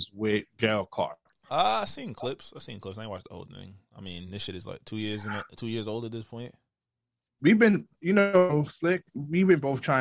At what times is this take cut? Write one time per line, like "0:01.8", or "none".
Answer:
none